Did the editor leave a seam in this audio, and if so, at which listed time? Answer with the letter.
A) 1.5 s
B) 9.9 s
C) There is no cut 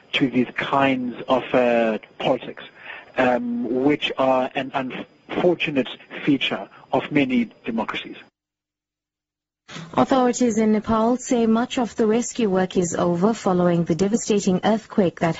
C